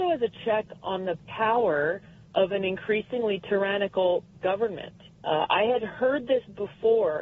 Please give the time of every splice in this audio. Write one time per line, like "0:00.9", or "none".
0:05.1